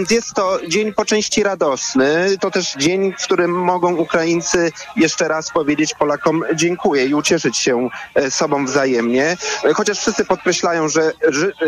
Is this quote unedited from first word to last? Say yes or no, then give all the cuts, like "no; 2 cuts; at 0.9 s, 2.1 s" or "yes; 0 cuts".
yes; 0 cuts